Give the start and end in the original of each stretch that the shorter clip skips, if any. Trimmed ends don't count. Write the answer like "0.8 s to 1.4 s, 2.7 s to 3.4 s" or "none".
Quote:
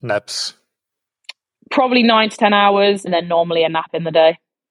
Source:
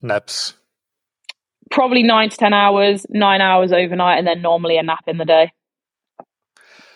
3.1 s to 4.2 s